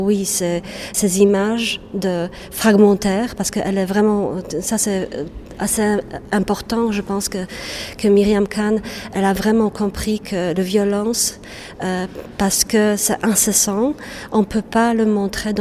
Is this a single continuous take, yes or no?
no